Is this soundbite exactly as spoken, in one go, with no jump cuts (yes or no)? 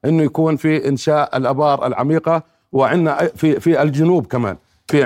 yes